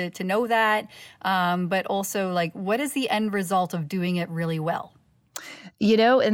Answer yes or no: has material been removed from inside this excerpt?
no